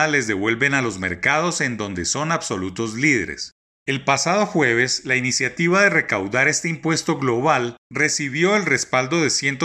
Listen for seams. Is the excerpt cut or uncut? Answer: uncut